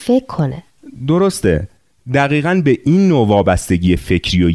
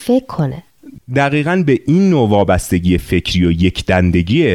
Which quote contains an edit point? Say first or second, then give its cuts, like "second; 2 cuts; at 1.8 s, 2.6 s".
second; 1 cut; at 1.0 s